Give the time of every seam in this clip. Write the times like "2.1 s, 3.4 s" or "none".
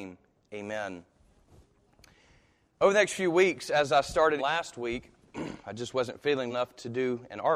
4.4 s, 6.5 s